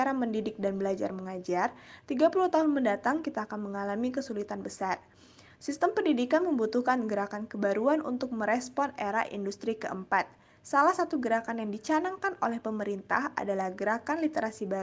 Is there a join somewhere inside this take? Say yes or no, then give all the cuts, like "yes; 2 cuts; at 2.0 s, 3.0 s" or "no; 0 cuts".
no; 0 cuts